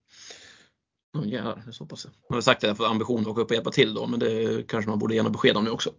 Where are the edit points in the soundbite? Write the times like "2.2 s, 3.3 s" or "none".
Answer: 1.0 s, 2.2 s